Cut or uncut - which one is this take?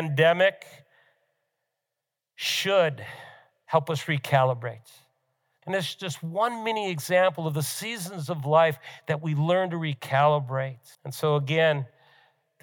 cut